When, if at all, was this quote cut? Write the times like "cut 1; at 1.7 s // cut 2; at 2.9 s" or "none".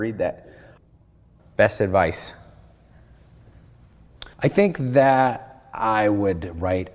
cut 1; at 1.4 s // cut 2; at 4.3 s